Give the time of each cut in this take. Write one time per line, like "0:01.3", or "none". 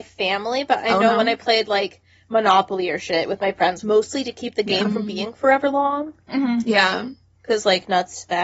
0:03.8